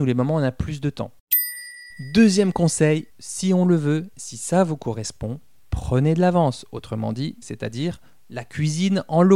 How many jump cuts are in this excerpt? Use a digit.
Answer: 2